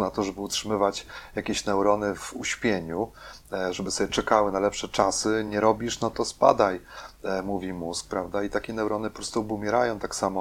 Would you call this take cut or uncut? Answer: uncut